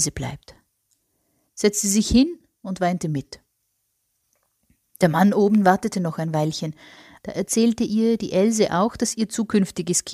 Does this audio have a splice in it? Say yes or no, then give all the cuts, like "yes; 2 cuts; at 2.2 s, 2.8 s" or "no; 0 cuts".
yes; 2 cuts; at 1.5 s, 7.2 s